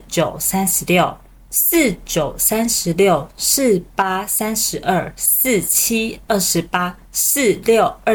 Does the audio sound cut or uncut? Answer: cut